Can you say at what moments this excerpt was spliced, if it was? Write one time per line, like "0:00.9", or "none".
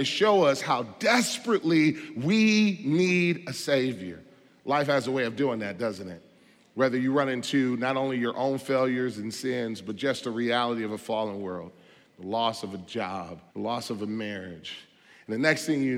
0:12.1
0:13.5